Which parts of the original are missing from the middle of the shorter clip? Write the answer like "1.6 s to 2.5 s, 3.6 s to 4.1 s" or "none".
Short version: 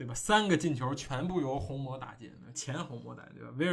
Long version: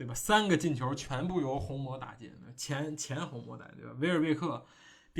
2.5 s to 3.0 s